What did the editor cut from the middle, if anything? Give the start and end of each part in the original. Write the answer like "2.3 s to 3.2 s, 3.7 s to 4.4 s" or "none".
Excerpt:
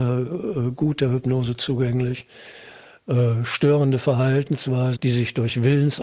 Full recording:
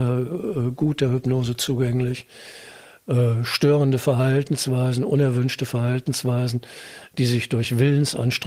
5.0 s to 7.1 s